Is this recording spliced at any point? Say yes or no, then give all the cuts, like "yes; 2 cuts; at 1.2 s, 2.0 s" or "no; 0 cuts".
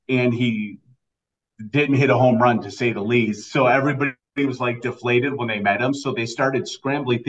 no; 0 cuts